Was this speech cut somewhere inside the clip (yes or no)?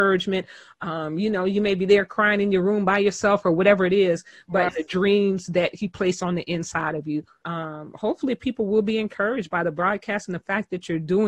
yes